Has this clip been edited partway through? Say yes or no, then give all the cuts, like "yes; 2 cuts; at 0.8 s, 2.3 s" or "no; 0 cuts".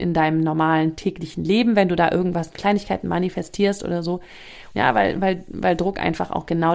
yes; 1 cut; at 4.7 s